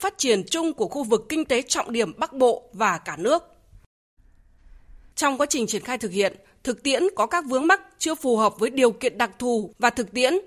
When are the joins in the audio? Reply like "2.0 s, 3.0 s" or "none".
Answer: 5.1 s